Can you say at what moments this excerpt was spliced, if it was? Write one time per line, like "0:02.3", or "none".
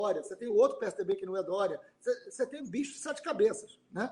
0:02.6

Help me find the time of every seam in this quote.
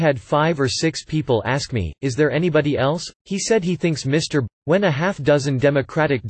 0:03.1
0:04.5

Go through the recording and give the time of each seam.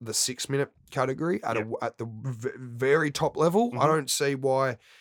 none

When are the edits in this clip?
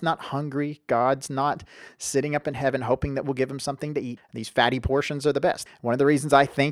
0:04.2
0:05.7

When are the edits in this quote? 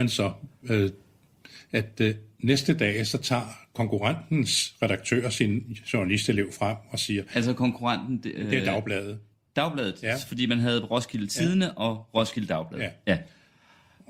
none

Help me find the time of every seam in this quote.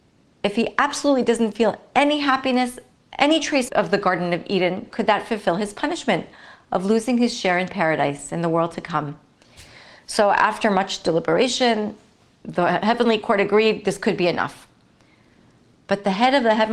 0:03.7

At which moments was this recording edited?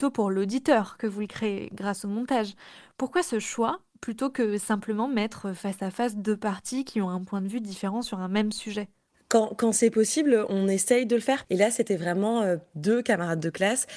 0:11.4

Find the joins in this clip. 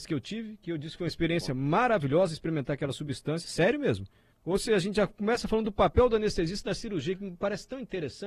0:04.3

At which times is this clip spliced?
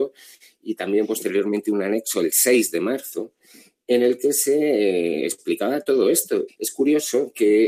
0:06.5

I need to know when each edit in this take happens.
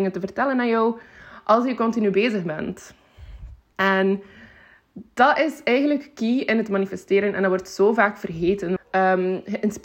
0:03.7
0:08.8

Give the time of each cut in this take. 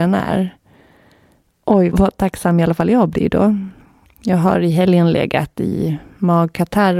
0:01.9
0:04.1

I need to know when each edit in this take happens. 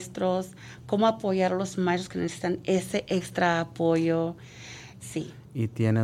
0:05.0

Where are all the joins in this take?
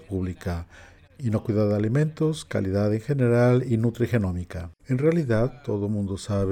0:01.1
0:04.8

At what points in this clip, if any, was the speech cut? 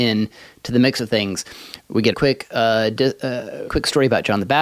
0:02.1
0:03.7

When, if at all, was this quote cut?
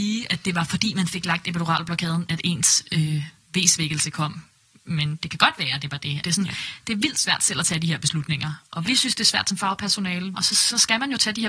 0:06.2
0:10.3

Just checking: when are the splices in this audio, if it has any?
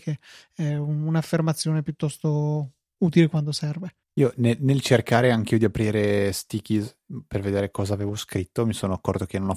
0:04.0

